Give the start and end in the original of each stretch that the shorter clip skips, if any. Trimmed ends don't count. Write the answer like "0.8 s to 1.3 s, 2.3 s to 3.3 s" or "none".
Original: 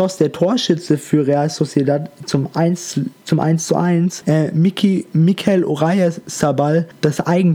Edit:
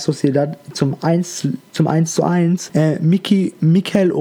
none